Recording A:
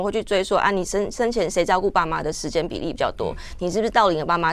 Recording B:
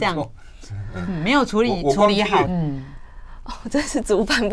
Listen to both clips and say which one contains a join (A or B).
B